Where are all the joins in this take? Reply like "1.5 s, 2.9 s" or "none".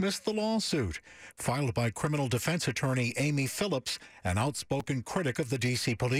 none